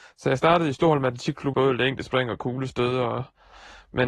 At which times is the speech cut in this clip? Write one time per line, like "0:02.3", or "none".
0:01.5